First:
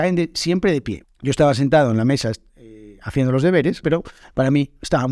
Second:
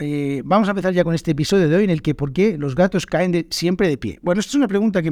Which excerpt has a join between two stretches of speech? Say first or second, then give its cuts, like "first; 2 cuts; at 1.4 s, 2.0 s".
first; 2 cuts; at 1.0 s, 3.8 s